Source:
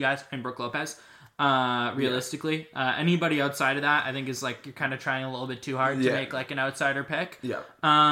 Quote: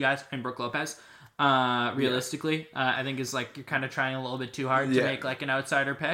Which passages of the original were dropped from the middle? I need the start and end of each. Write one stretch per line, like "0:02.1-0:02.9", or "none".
0:03.0-0:04.0